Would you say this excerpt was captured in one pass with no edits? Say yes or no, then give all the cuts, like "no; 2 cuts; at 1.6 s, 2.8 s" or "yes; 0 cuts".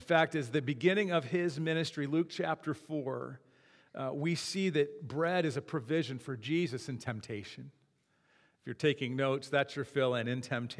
yes; 0 cuts